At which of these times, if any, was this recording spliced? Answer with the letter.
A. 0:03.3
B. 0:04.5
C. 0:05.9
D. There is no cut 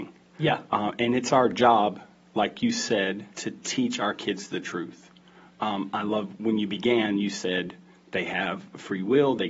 A